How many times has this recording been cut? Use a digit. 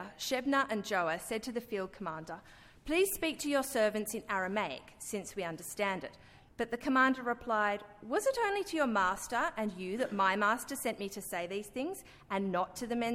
1